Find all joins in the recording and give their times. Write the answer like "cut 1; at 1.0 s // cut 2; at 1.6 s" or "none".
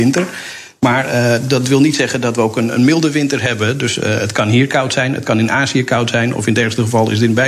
none